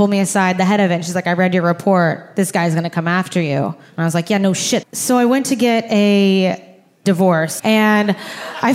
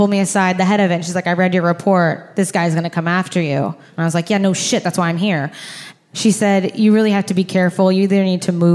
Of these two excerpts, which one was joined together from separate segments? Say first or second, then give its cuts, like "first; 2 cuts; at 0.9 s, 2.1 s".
first; 2 cuts; at 4.8 s, 7.6 s